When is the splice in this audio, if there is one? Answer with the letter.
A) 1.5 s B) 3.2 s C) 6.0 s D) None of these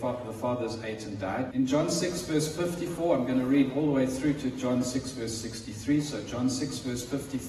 A